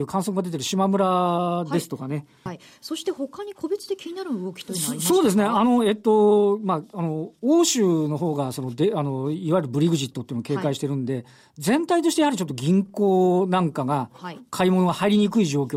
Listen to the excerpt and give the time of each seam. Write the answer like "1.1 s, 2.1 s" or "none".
2.5 s